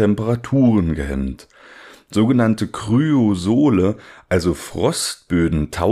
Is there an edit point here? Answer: no; 0 cuts

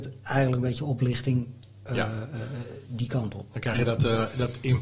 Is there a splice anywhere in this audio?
no; 0 cuts

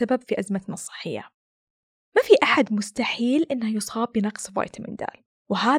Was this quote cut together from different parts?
no; 0 cuts

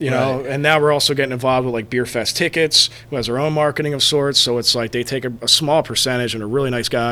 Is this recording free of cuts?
yes; 0 cuts

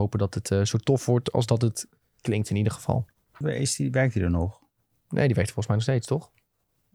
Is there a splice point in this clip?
yes; 1 cut; at 3.4 s

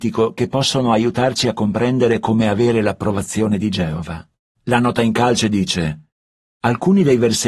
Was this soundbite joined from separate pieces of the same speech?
yes; 1 cut; at 4.5 s

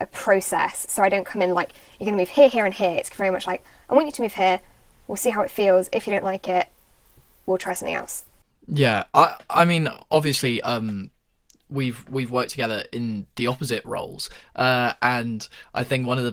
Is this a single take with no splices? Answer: yes; 0 cuts

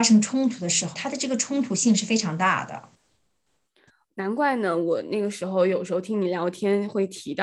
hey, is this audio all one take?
no; 1 cut; at 0.9 s

